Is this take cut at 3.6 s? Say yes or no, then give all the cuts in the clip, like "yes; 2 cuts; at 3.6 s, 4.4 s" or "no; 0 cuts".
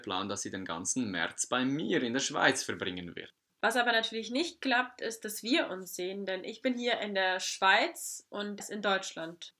yes; 2 cuts; at 3.6 s, 8.6 s